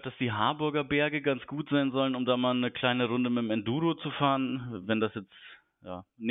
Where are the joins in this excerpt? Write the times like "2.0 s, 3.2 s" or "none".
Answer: none